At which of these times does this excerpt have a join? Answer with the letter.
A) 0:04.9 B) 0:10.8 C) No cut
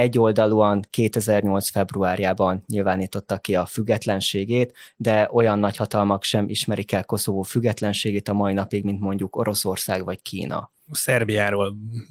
A